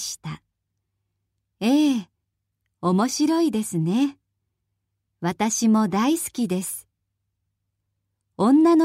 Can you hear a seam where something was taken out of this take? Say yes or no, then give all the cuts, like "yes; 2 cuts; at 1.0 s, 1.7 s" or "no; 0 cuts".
no; 0 cuts